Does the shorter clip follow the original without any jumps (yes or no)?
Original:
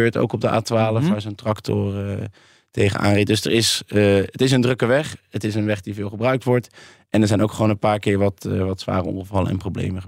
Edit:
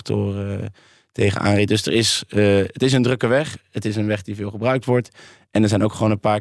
yes